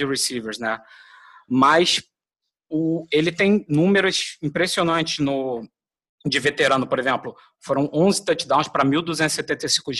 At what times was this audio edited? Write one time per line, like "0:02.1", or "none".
none